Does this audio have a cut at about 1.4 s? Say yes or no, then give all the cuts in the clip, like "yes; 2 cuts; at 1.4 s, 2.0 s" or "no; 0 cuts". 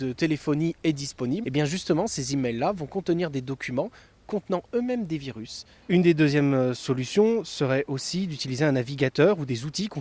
yes; 2 cuts; at 1.4 s, 5.8 s